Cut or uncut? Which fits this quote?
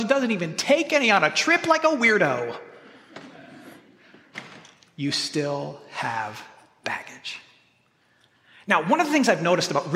uncut